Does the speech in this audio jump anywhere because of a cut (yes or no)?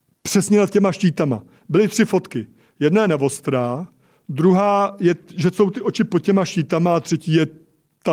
no